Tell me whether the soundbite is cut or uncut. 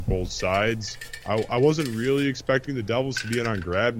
uncut